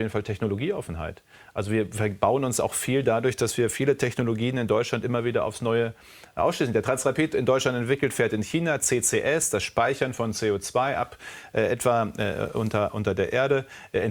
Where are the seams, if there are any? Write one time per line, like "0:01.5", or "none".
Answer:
none